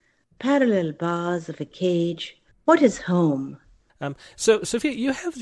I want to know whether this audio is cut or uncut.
cut